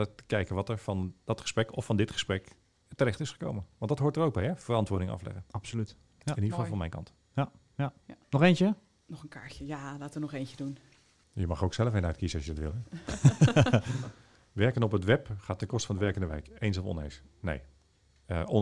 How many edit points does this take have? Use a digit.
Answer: 1